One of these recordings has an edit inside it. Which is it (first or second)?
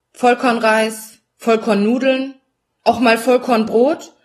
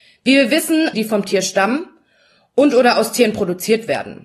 second